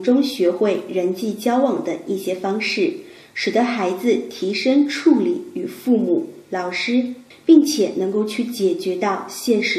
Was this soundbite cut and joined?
yes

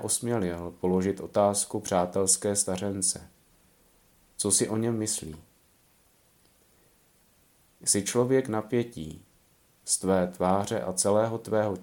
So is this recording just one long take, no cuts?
yes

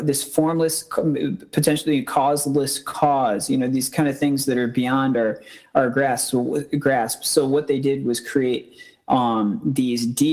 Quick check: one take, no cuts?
yes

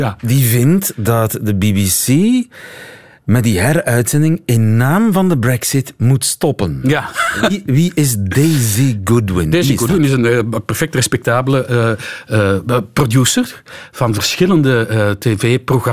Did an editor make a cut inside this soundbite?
no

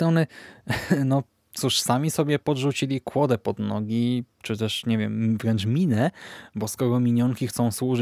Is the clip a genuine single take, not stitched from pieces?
yes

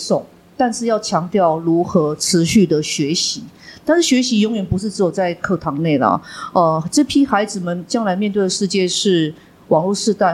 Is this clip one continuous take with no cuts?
yes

